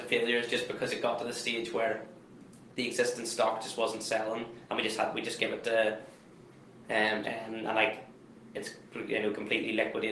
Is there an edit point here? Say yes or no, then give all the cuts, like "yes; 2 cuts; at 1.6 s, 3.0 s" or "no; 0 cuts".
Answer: yes; 1 cut; at 7.2 s